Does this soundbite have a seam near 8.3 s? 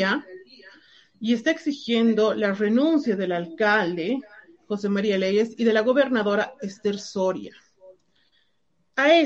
no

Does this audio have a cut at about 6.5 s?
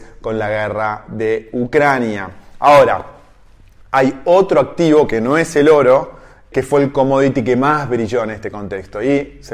yes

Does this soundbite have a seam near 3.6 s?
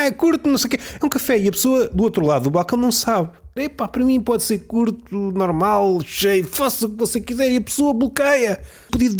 yes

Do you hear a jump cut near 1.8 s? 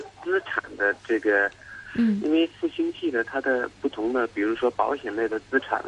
yes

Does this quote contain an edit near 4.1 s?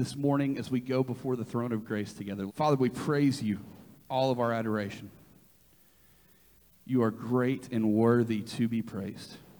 yes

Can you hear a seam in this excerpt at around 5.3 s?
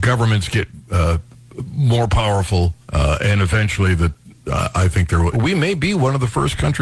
yes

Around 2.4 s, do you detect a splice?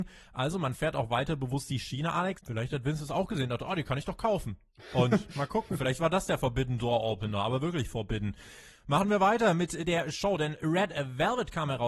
yes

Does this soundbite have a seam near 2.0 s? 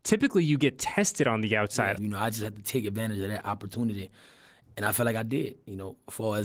yes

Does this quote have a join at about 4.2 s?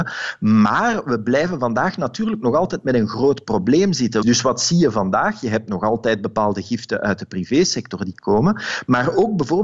yes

